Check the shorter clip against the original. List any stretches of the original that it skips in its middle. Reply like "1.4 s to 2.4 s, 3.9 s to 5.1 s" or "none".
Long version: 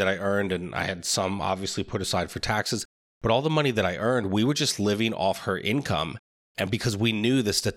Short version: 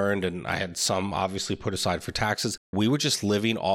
3.0 s to 4.3 s